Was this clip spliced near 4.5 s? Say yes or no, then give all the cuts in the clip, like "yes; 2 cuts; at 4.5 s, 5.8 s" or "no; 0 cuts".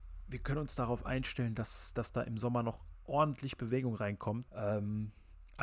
yes; 1 cut; at 4.5 s